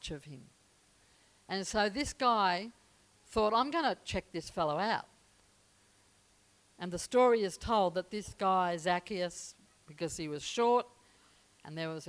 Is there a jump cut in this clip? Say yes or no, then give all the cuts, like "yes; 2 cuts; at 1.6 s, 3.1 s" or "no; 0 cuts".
no; 0 cuts